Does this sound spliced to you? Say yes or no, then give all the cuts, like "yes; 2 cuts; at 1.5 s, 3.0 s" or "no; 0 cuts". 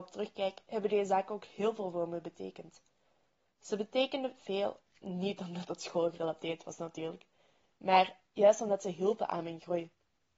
no; 0 cuts